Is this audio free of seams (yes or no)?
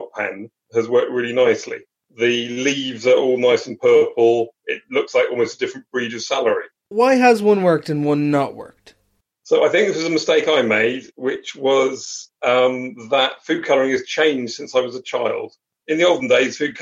yes